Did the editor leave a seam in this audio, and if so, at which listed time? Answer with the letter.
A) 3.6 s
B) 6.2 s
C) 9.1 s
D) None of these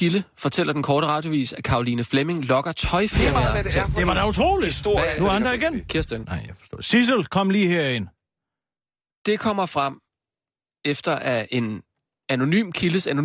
B